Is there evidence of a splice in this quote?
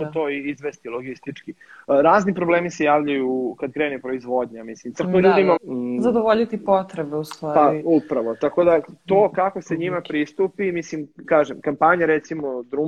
yes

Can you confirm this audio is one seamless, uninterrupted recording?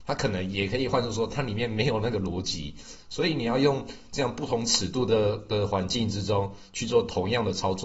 yes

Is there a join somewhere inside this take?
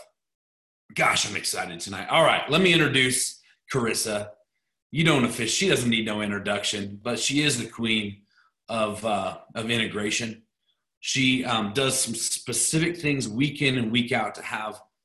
no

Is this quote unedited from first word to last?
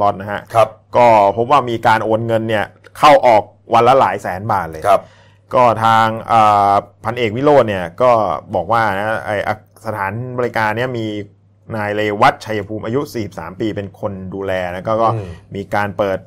yes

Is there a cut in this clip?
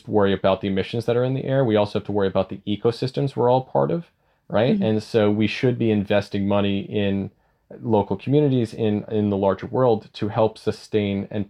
no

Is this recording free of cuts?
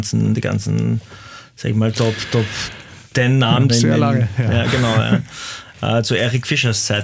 no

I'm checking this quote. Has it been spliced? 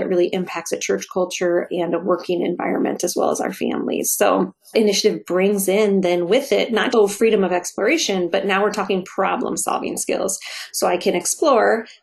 yes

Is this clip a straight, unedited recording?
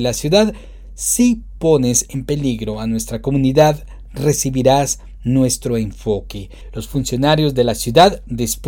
yes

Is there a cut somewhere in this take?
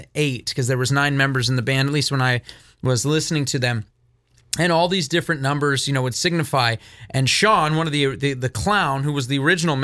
no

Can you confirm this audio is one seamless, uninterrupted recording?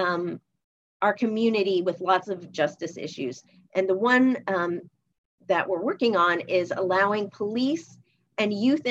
yes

